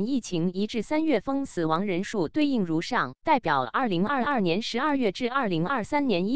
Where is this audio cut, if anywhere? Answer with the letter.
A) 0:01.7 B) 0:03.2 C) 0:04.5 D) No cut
B